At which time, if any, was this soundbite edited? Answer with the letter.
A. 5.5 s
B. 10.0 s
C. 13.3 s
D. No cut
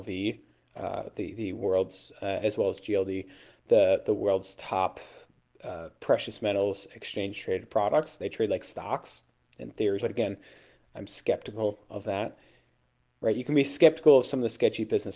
B